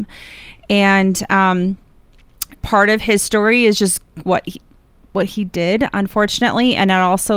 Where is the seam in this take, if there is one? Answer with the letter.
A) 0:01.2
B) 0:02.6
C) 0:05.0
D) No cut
B